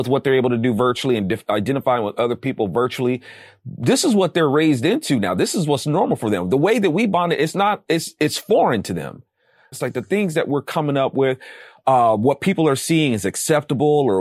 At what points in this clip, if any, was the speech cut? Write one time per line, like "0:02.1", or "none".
0:09.7